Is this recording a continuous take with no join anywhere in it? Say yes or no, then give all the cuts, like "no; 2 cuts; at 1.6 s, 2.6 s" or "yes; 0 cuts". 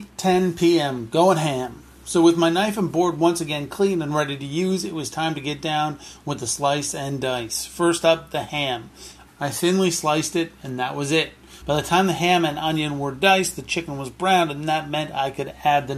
no; 2 cuts; at 9.3 s, 11.6 s